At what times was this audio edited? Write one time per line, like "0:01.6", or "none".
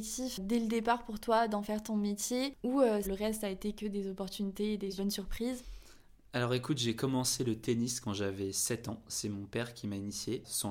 0:03.0